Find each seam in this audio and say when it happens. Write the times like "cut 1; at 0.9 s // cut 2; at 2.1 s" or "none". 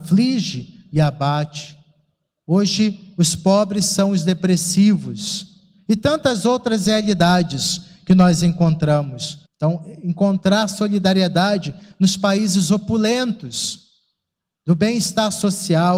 cut 1; at 9.4 s